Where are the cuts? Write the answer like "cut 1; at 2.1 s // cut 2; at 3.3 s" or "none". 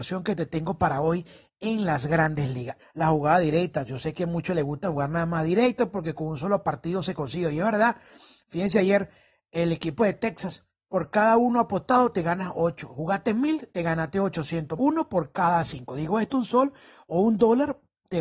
cut 1; at 2.8 s // cut 2; at 14.8 s